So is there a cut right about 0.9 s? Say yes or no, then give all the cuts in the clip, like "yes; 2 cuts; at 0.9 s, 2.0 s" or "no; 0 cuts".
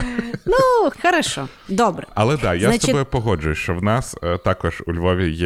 yes; 1 cut; at 0.9 s